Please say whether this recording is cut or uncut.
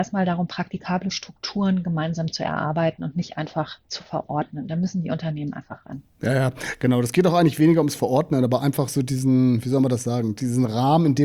uncut